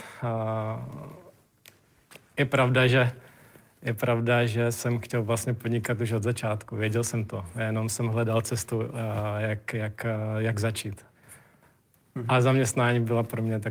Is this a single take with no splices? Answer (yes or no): yes